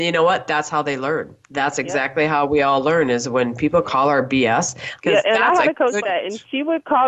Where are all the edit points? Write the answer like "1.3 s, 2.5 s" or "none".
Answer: 1.4 s, 5.0 s, 6.0 s